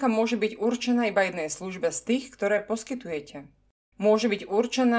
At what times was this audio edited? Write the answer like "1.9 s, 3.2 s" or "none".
3.9 s